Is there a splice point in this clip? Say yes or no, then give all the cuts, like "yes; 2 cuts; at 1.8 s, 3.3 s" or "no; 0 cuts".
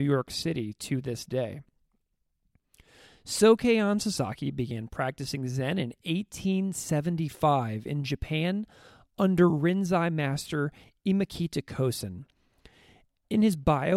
no; 0 cuts